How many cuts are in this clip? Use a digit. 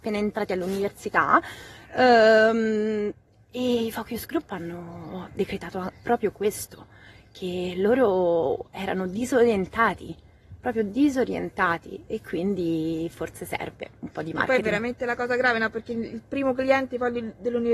0